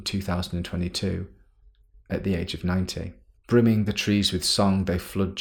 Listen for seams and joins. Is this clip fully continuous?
no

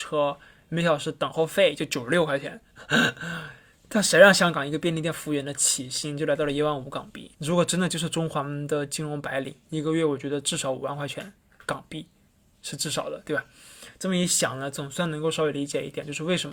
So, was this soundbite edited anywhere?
yes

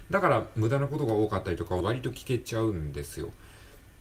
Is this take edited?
yes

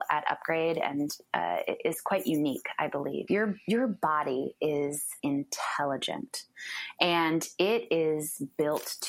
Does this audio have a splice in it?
yes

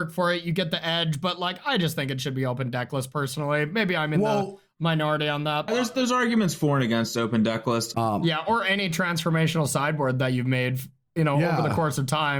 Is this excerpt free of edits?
no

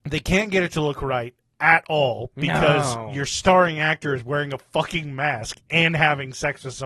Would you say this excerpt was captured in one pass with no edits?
yes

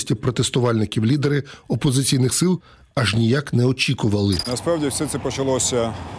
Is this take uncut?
yes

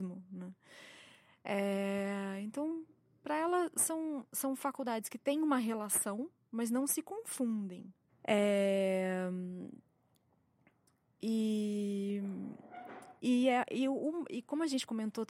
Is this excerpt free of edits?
no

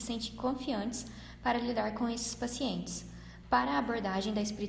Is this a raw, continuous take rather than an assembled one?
no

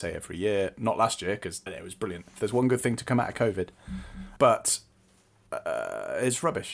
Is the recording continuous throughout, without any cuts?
no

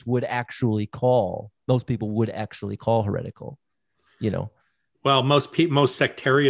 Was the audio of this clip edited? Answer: no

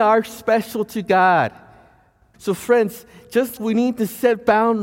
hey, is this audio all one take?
no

